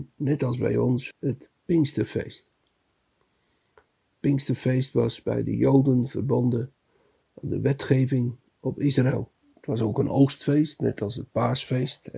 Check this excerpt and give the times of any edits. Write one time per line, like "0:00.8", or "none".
0:01.1